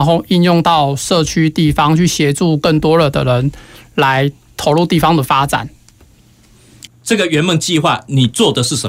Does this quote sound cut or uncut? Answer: cut